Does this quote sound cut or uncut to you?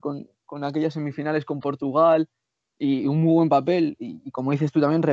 uncut